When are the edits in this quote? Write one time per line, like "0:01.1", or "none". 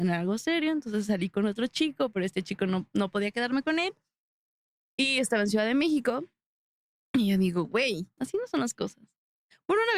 0:07.0
0:08.2